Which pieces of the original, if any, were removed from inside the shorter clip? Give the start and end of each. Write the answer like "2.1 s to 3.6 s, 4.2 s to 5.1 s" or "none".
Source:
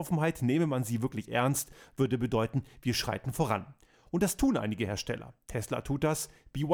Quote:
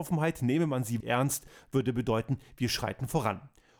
1.0 s to 1.3 s

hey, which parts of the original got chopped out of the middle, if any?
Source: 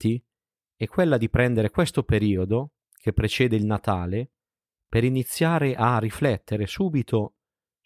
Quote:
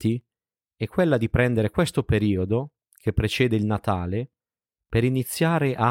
none

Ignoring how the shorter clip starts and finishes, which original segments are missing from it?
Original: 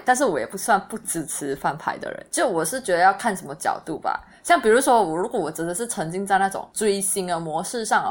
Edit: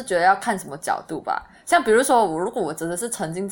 none

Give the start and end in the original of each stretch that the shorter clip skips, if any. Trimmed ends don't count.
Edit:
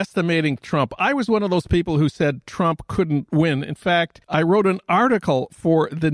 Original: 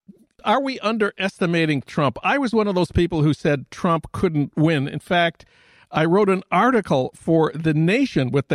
5.5 s to 5.9 s

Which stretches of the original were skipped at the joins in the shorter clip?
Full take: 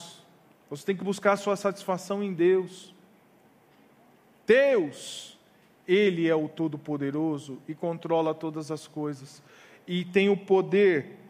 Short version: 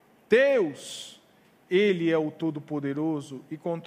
none

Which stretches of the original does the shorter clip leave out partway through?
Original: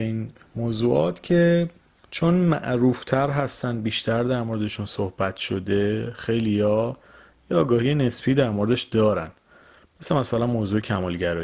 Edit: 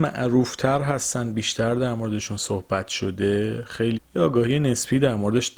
6.4 s to 7.3 s

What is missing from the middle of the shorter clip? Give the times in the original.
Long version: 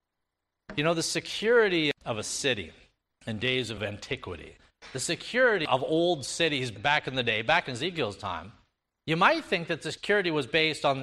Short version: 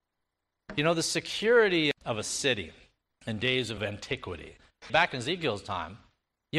4.9 s to 7.4 s

